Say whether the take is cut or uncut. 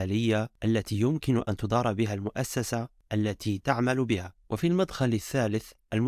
cut